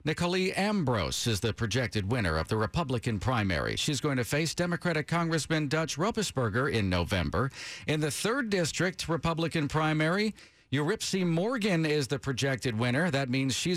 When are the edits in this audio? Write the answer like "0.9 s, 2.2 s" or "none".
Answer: none